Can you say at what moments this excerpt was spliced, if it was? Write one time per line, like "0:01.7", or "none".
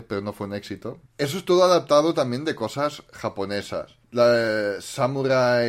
0:01.1
0:04.0